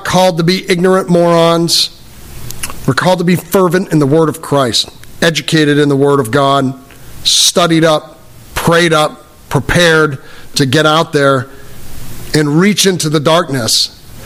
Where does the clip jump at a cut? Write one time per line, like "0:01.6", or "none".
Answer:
none